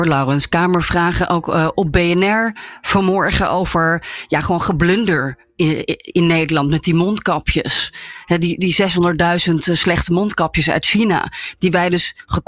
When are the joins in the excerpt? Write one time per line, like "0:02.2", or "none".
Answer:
none